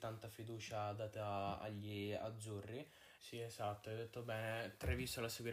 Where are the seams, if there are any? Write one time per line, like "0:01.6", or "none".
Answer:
0:03.2